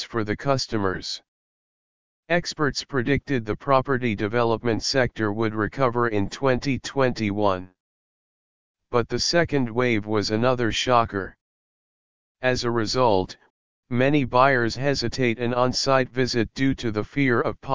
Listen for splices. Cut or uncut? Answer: cut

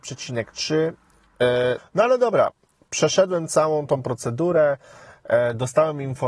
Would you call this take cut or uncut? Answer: cut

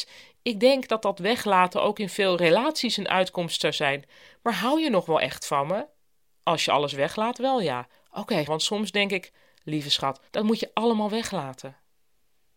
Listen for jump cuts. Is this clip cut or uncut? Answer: cut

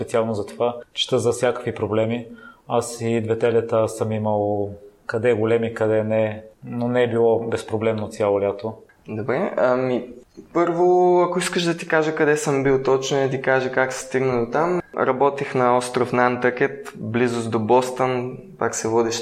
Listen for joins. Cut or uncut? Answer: uncut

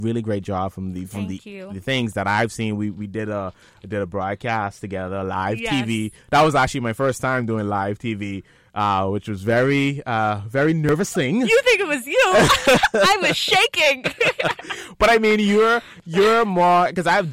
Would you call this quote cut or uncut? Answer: uncut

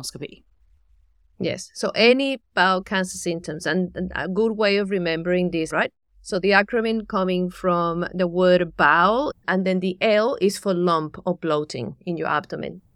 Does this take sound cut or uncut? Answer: cut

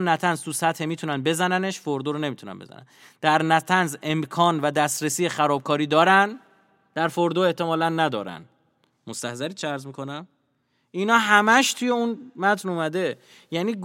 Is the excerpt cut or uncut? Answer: uncut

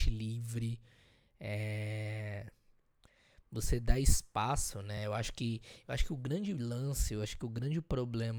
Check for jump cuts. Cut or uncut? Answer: uncut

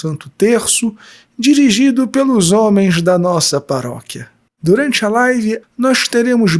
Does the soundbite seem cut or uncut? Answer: cut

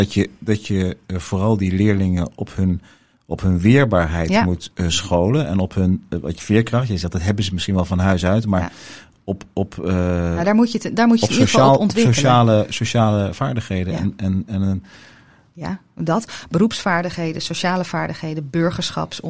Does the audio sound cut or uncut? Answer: cut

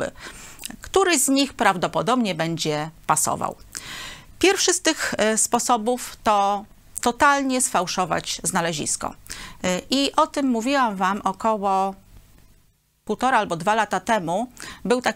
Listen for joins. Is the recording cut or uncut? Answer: uncut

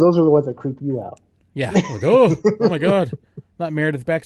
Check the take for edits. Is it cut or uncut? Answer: uncut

